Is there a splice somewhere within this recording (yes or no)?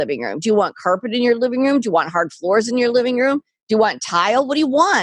no